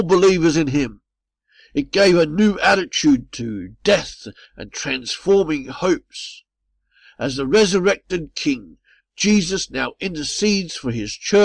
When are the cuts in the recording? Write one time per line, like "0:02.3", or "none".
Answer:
none

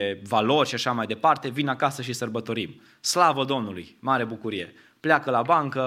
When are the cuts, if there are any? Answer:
none

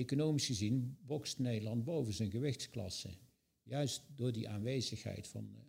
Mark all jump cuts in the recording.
none

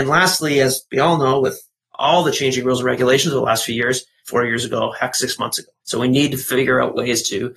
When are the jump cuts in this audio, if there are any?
0:04.2
0:05.8

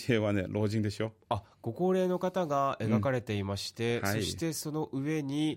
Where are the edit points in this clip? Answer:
none

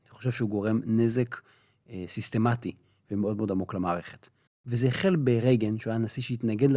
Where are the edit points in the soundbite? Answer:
0:04.5

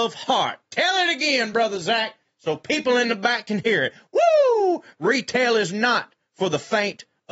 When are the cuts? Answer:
none

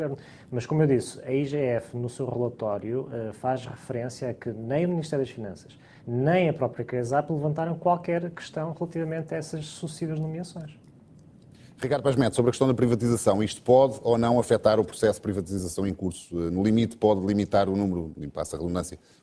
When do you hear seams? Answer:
0:06.0

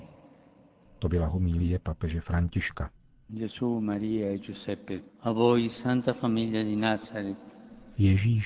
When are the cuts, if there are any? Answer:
0:03.3
0:05.1

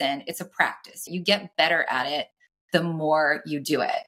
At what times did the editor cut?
0:01.1

